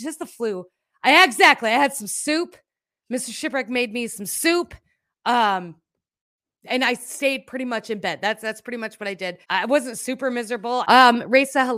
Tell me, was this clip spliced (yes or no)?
yes